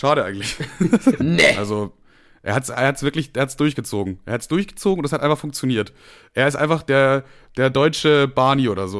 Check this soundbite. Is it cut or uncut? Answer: cut